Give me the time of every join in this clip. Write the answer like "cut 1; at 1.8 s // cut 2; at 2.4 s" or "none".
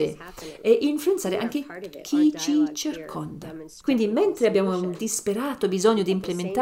cut 1; at 3.8 s